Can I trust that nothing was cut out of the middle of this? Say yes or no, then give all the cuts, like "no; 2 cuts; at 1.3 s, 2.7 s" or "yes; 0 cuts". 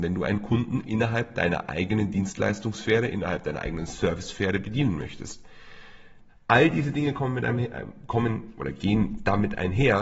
no; 1 cut; at 6.3 s